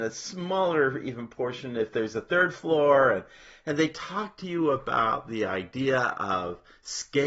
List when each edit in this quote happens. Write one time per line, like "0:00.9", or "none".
none

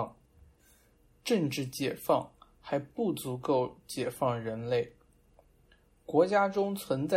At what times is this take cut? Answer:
none

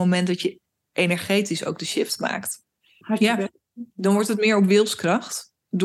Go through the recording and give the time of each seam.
0:03.0

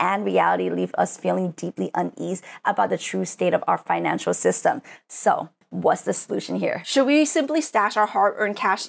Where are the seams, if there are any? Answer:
none

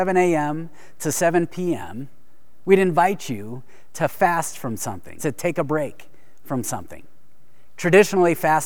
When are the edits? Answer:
0:05.2

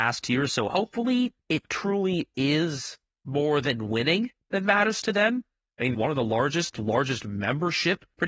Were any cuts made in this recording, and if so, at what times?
0:05.9

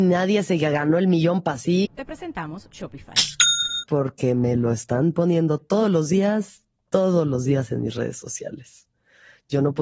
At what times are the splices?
0:01.8
0:03.8

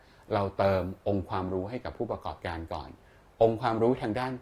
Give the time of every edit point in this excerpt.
none

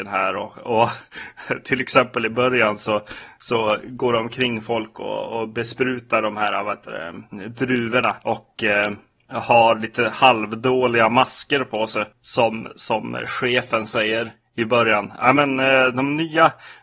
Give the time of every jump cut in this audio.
none

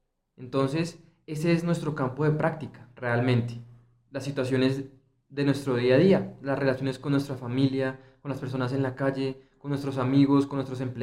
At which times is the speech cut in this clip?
none

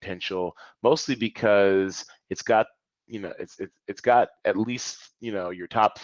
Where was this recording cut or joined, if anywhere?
none

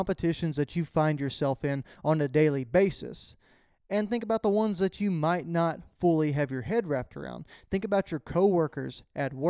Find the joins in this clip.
none

